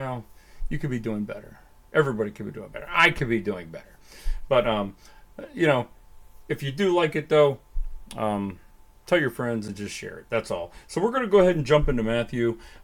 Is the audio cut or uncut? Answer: uncut